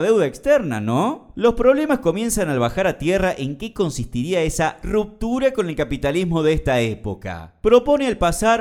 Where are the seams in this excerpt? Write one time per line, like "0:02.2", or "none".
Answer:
0:01.3